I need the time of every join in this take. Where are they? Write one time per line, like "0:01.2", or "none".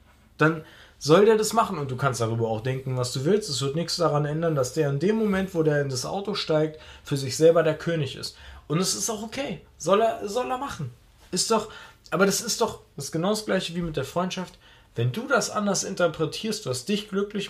none